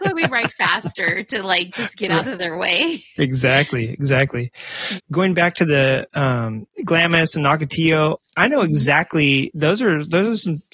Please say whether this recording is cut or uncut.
cut